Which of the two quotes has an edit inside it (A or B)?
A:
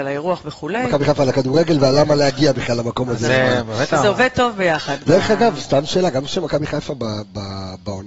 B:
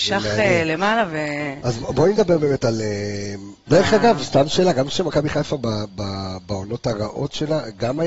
B